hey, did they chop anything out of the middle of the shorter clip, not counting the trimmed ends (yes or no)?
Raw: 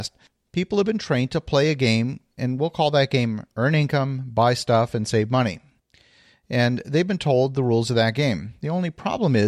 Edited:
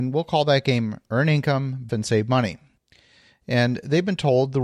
yes